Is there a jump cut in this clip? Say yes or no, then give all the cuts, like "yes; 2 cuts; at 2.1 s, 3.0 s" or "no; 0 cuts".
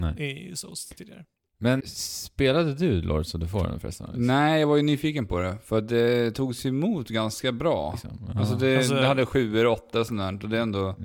yes; 2 cuts; at 1.8 s, 7.9 s